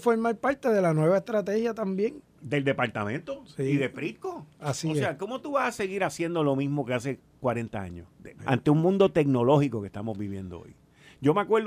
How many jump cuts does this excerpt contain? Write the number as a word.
one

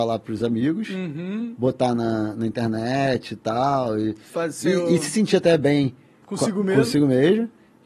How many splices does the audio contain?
zero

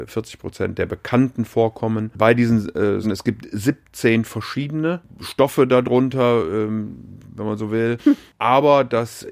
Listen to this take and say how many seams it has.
two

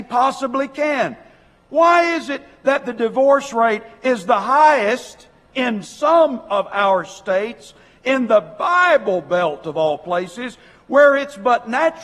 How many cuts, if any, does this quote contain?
zero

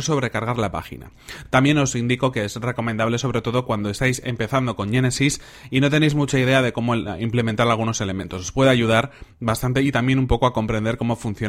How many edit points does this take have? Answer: zero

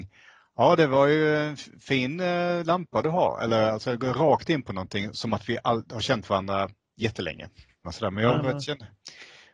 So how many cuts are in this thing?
one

